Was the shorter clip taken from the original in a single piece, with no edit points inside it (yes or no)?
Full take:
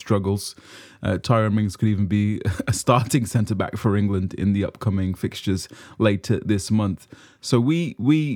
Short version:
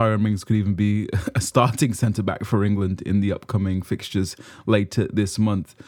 yes